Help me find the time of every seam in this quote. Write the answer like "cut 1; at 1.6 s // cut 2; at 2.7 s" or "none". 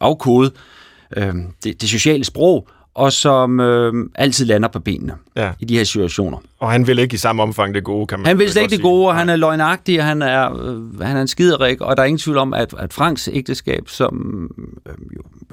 cut 1; at 12.7 s